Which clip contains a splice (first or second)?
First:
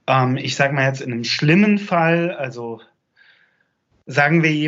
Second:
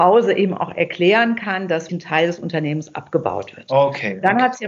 second